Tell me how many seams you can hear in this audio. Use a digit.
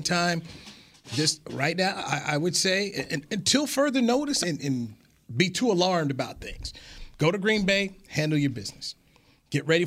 1